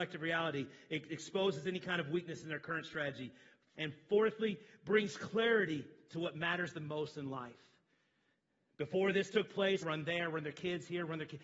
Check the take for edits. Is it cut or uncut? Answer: cut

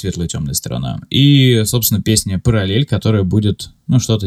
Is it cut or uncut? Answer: uncut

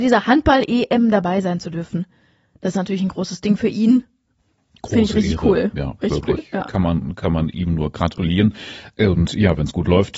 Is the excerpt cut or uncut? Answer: uncut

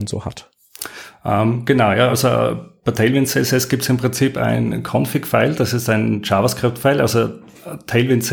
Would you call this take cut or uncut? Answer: uncut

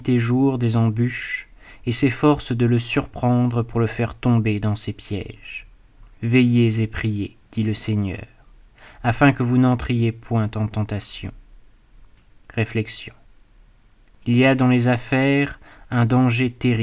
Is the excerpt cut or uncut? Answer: uncut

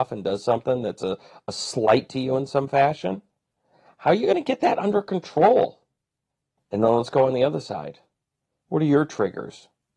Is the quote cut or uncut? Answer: cut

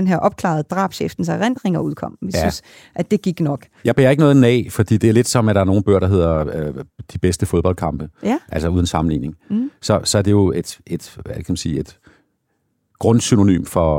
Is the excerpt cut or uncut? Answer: uncut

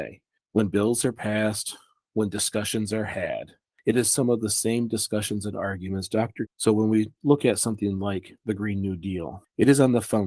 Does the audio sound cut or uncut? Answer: cut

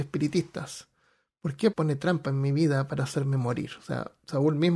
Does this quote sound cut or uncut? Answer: cut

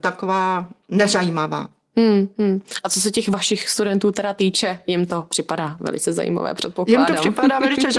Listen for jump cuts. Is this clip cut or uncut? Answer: uncut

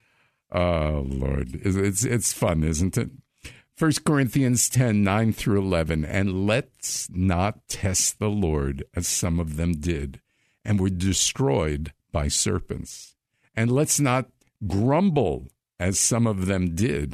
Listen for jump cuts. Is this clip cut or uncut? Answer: uncut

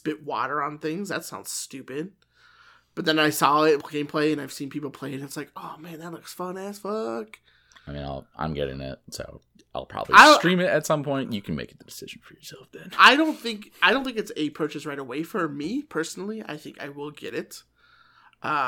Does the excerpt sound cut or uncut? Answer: cut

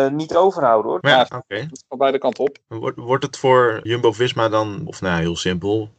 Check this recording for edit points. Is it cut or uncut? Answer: cut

